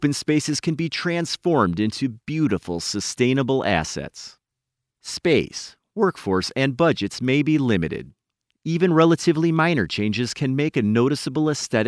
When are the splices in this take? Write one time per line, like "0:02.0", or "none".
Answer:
0:04.9